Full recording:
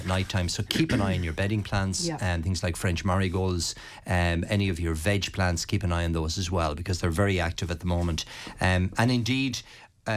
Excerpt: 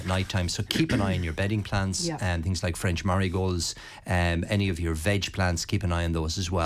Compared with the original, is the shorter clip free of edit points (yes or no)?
yes